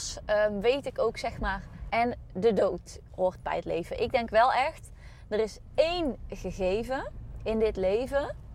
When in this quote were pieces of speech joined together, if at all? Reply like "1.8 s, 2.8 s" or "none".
1.9 s